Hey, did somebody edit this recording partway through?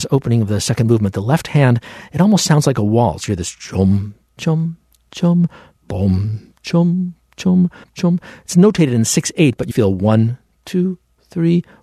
yes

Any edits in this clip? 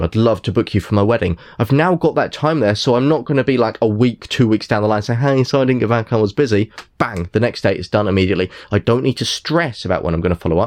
no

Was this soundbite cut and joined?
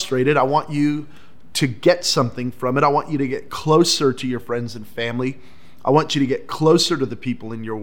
no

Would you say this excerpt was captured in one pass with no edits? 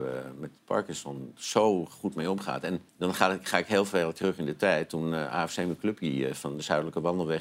no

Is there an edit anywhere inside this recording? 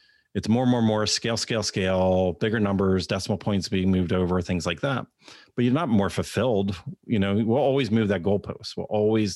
no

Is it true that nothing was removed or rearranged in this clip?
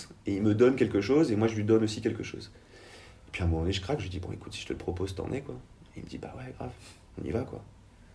yes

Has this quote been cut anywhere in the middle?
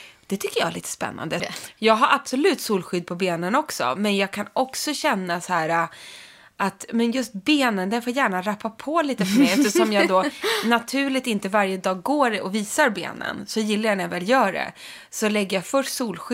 yes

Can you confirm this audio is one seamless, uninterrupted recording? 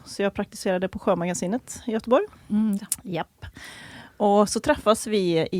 no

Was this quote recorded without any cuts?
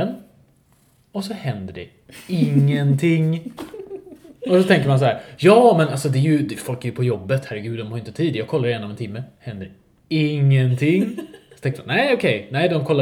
yes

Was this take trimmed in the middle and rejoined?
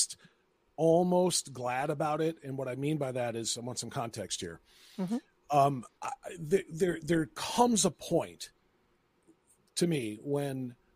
yes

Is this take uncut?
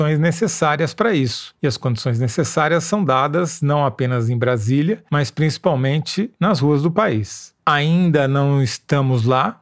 yes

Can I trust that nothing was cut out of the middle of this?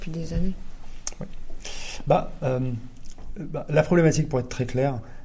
no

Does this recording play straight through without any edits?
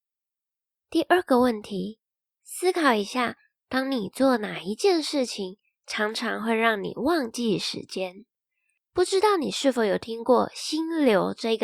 yes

